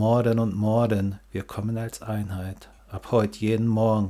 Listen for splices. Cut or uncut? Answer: uncut